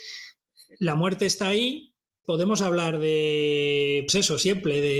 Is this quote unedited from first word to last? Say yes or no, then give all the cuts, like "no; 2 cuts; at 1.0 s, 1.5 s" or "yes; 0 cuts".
no; 2 cuts; at 2.2 s, 4.1 s